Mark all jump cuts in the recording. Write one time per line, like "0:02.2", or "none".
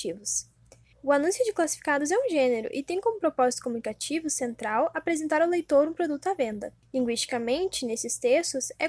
0:00.9

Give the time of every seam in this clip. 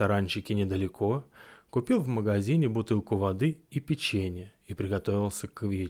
none

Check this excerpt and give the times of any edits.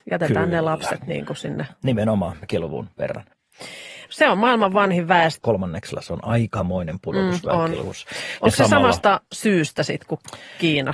0:02.4
0:04.1
0:05.4

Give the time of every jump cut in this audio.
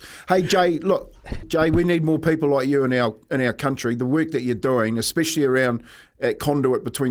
0:01.4

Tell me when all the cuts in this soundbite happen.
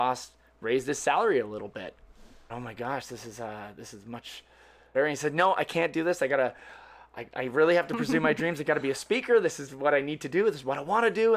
0:02.5
0:04.9

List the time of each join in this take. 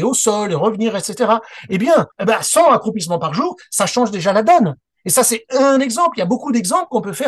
0:02.1

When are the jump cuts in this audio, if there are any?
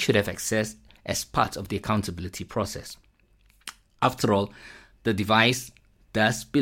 none

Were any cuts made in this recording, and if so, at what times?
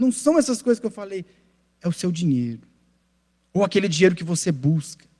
none

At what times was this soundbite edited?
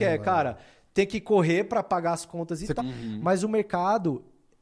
0:02.8

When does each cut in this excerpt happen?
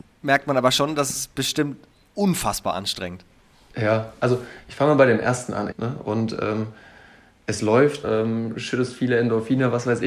0:05.7
0:08.0

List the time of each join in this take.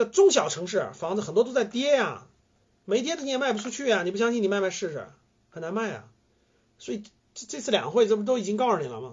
none

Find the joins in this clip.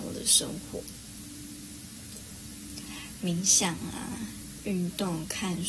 0:03.2

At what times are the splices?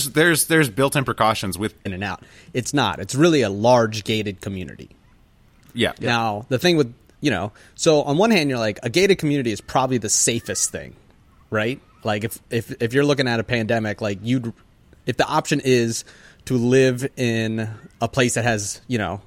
0:01.9

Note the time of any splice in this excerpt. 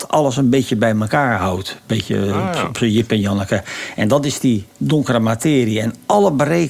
none

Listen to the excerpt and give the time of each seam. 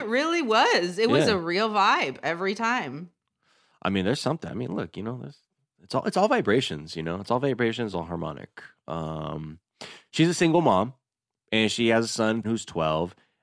0:07.9
0:12.4

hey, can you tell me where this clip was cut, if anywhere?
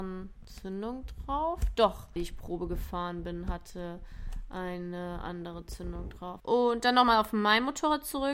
0:02.2
0:06.4

